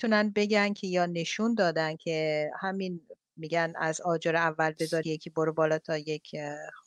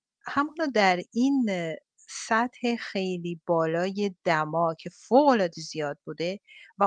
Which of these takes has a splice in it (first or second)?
first